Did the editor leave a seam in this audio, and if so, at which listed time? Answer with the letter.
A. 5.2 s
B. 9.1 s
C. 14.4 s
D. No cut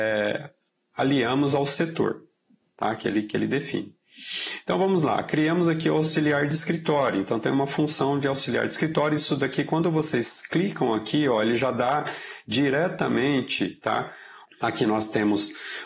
C